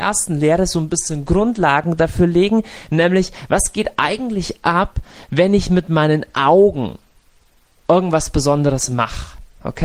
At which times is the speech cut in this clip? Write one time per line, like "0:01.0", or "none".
none